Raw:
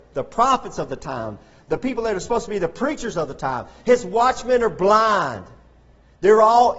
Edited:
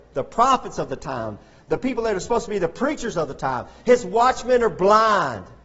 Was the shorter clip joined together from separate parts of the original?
no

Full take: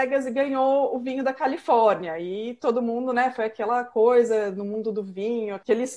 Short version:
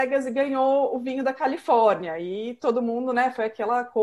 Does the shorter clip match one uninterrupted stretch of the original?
yes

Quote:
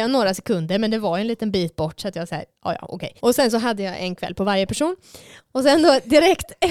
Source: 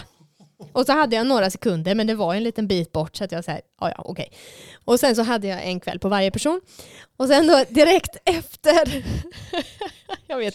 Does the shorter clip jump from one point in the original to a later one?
yes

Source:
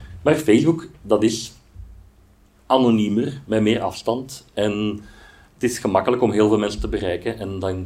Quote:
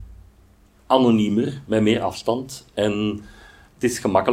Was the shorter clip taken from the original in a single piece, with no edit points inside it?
yes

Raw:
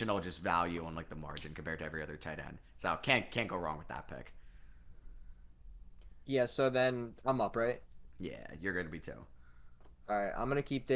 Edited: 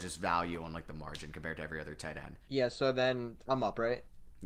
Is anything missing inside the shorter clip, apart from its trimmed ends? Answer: yes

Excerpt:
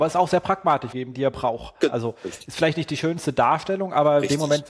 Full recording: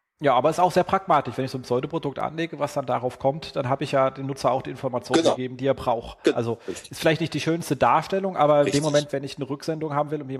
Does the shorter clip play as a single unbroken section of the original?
no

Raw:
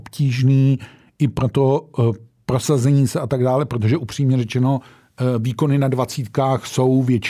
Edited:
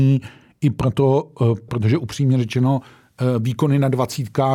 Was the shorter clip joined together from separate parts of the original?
yes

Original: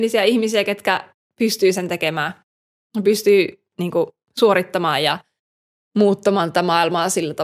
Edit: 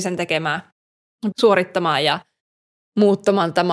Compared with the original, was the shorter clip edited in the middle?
yes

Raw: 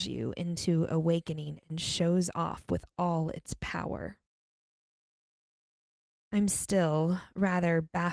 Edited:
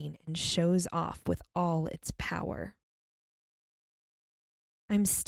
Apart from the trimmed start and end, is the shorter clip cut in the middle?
no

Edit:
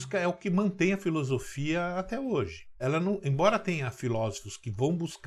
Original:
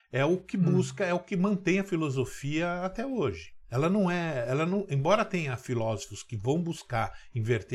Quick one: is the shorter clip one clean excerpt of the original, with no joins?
no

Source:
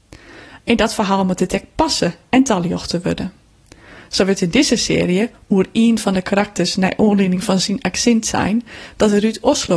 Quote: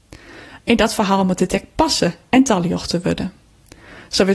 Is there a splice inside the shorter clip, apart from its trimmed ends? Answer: no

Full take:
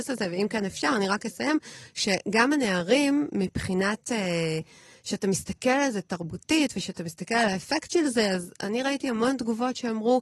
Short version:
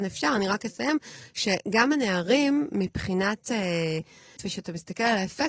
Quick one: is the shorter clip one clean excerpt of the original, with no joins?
no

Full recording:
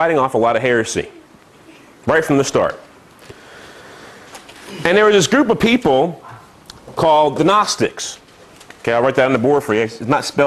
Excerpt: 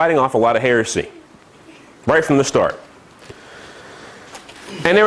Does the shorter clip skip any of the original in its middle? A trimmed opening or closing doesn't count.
no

